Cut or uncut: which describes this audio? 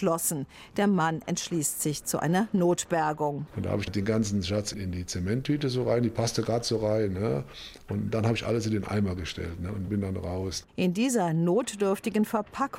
cut